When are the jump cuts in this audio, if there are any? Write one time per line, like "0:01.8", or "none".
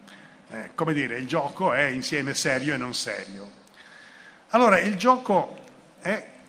none